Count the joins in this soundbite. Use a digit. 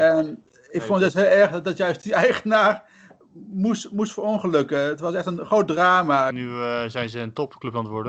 1